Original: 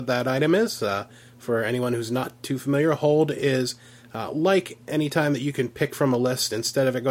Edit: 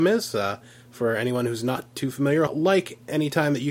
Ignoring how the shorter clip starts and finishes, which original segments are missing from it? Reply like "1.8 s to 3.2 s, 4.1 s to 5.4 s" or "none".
2.9 s to 4.3 s